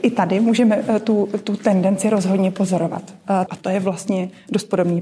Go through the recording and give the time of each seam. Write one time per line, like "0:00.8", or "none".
0:03.5